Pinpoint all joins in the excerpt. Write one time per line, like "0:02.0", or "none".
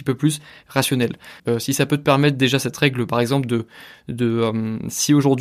0:01.4